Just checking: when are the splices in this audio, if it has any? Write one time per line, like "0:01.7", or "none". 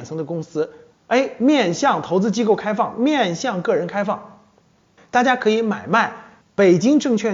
0:00.9
0:05.0

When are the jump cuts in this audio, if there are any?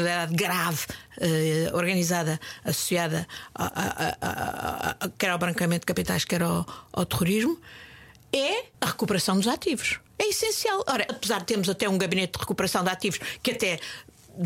0:08.7
0:10.1
0:11.1

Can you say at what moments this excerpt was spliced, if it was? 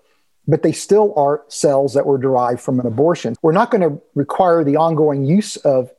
0:03.4

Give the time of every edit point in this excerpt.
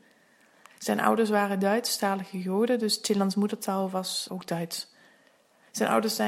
0:04.3

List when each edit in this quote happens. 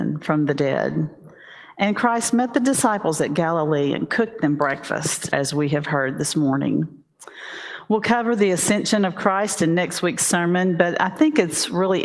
0:05.3

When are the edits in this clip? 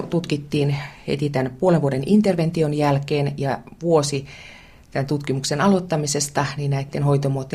none

